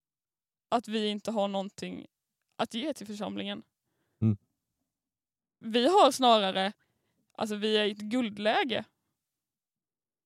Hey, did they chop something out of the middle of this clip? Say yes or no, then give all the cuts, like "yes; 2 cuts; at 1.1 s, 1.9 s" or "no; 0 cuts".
no; 0 cuts